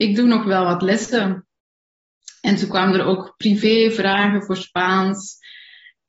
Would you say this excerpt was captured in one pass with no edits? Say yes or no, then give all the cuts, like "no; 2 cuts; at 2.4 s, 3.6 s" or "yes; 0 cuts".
yes; 0 cuts